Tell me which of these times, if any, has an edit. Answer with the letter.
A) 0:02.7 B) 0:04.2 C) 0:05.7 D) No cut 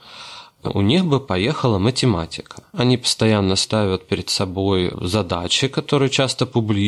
A